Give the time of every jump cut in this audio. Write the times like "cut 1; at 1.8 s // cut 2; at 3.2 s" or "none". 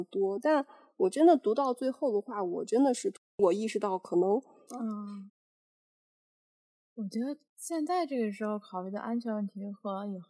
cut 1; at 4.7 s // cut 2; at 7.5 s